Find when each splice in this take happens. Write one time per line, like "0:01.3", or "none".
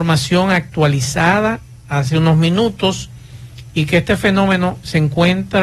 none